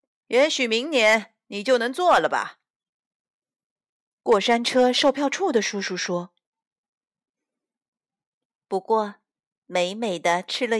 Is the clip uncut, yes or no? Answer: yes